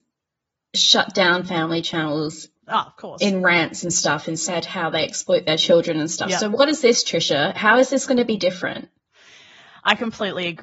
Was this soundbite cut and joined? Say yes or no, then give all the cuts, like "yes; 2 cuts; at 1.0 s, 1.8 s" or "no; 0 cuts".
yes; 1 cut; at 2.6 s